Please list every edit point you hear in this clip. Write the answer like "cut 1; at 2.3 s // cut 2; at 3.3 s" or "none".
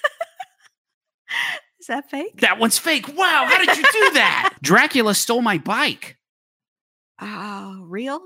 cut 1; at 4.6 s